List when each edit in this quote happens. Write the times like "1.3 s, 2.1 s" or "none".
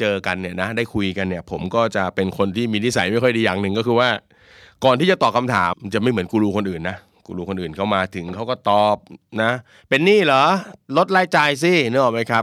5.7 s